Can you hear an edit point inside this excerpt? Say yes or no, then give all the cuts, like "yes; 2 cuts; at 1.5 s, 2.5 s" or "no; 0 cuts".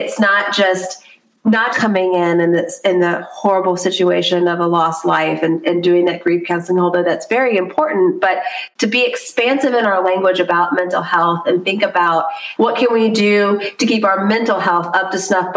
yes; 1 cut; at 1.7 s